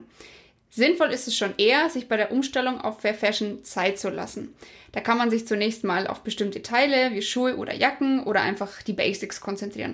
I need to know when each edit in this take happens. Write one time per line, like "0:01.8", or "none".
none